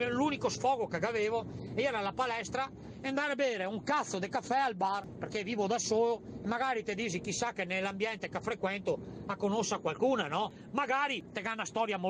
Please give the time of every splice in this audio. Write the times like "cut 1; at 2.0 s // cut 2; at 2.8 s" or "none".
none